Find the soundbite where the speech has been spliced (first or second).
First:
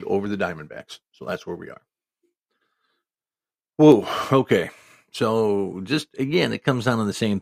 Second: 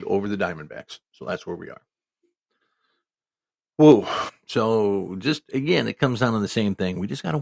second